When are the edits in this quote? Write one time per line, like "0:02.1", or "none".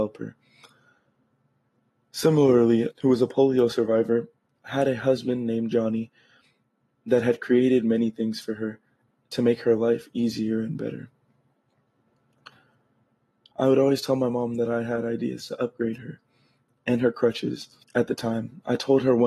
0:02.9
0:13.5
0:17.8